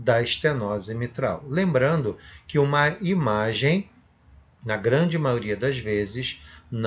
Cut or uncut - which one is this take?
uncut